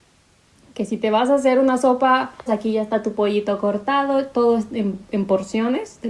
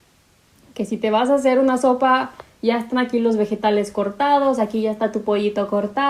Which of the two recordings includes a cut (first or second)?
first